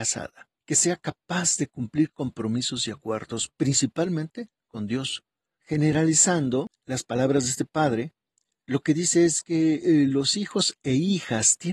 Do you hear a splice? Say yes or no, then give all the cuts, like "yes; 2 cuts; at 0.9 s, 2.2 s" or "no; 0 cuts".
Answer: yes; 1 cut; at 5.6 s